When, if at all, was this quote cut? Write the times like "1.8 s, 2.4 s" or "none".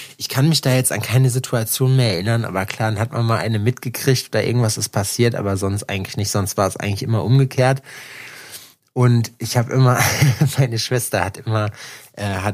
none